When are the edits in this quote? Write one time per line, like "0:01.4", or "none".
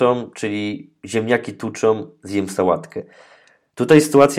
none